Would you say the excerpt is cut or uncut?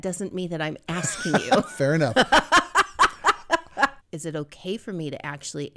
cut